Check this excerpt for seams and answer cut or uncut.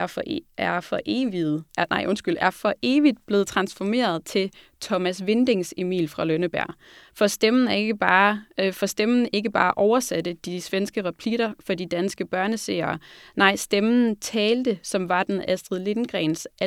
uncut